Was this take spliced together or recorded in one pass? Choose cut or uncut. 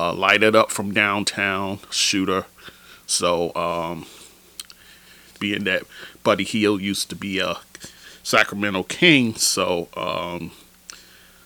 cut